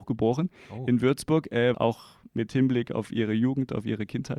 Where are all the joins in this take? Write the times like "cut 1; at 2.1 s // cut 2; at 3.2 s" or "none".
cut 1; at 1.7 s